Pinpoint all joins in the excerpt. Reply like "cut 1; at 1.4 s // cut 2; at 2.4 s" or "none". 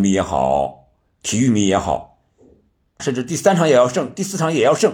cut 1; at 3.0 s